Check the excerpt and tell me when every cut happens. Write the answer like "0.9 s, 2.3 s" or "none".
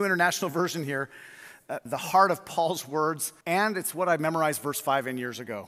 1.9 s, 3.4 s